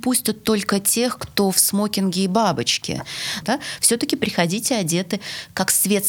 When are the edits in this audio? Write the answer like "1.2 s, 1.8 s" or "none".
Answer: 3.4 s